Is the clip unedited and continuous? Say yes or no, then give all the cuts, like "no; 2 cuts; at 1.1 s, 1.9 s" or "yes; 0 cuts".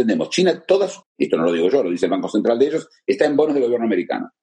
no; 1 cut; at 1.0 s